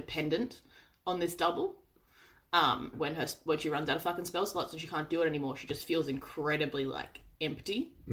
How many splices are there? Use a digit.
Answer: 1